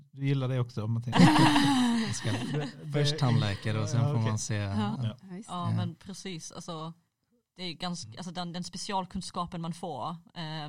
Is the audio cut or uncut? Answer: cut